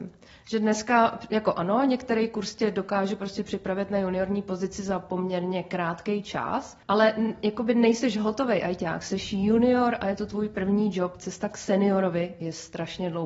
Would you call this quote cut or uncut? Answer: cut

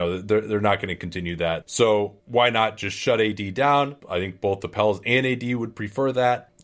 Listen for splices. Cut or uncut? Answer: cut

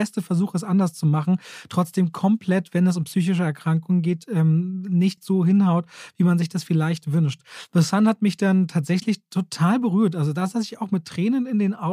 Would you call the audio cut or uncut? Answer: uncut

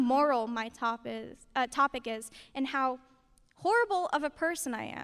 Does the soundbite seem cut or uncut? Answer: uncut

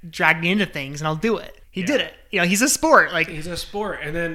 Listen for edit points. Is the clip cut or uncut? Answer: cut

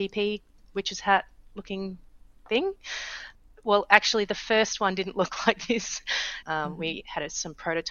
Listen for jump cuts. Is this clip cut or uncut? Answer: cut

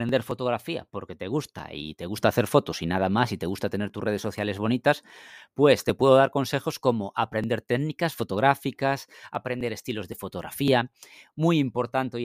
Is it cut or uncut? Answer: uncut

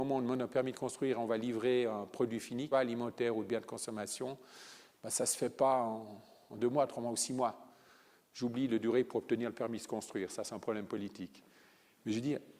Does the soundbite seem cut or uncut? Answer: cut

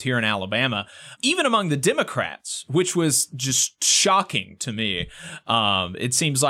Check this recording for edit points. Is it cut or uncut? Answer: cut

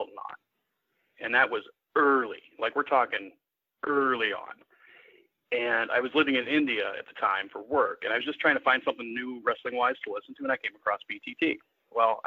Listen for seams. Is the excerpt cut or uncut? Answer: uncut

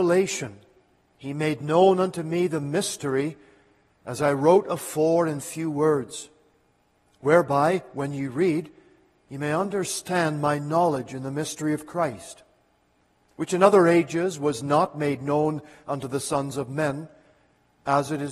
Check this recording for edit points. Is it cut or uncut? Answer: uncut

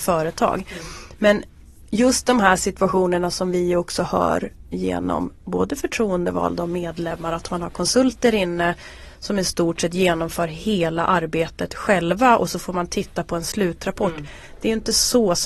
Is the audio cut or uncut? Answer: uncut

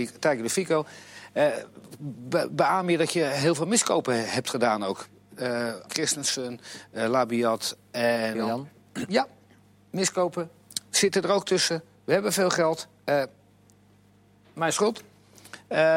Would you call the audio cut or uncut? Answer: cut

